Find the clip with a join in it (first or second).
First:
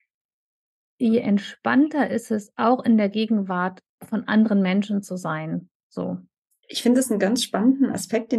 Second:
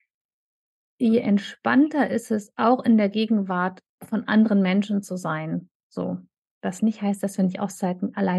first